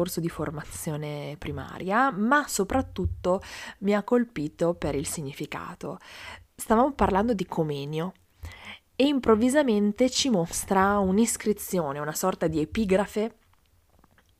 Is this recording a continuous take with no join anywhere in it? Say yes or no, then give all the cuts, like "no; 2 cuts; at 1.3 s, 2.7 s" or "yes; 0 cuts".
no; 2 cuts; at 6.4 s, 8.9 s